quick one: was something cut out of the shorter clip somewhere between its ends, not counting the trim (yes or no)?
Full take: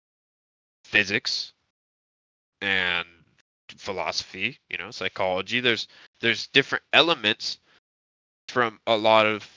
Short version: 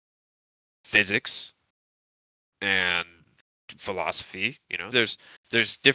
yes